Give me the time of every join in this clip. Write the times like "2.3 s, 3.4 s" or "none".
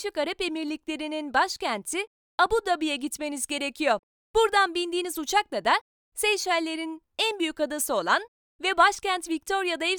none

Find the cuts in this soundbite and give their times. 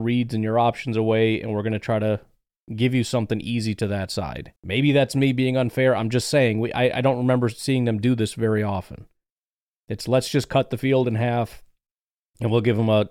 4.6 s

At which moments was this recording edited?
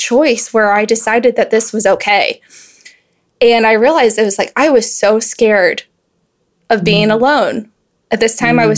none

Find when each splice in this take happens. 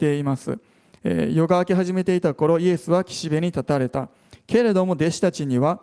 none

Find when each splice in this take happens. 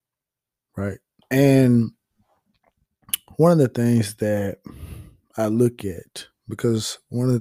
1.2 s

